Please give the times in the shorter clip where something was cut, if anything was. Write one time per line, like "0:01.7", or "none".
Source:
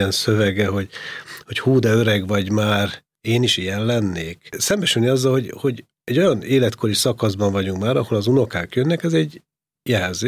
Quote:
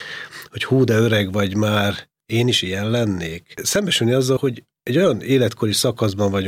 0:04.4